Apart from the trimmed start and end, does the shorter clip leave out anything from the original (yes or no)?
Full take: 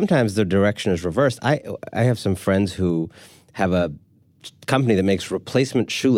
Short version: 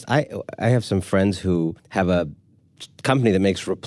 yes